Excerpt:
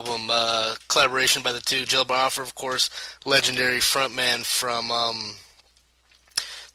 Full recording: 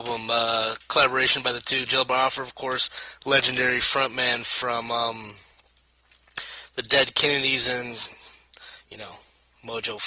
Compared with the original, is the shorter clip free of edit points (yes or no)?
yes